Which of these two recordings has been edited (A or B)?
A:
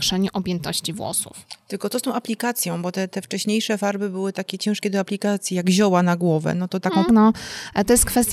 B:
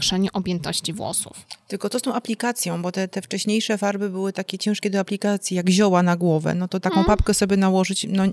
A